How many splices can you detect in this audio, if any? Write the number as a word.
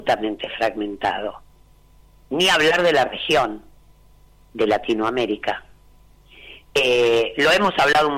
one